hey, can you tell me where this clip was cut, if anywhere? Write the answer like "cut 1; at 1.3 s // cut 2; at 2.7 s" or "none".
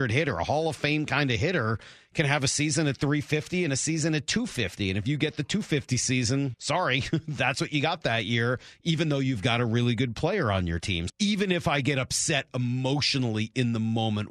cut 1; at 6.5 s // cut 2; at 11.1 s